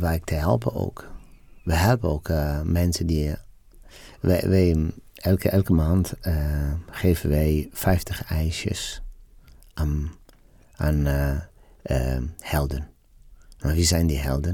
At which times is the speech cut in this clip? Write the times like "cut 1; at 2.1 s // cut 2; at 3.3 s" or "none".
none